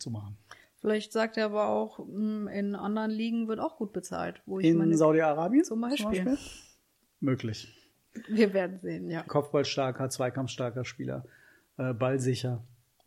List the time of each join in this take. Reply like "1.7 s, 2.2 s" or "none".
9.2 s